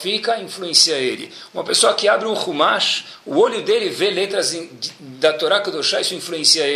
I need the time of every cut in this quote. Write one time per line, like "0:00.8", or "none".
none